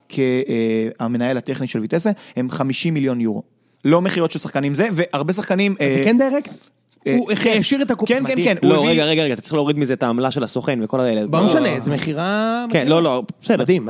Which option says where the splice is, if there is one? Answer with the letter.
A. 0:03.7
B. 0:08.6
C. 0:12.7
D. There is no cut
A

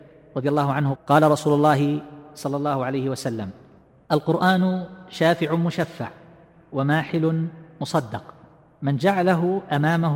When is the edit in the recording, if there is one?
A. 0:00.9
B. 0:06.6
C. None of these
A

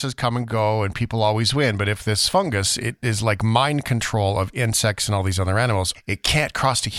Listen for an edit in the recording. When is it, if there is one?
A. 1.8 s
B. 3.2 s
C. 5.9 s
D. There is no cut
C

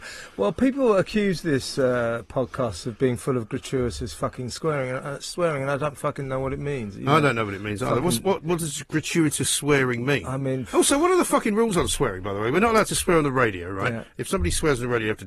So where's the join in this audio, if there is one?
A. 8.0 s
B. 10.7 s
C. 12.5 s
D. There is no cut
D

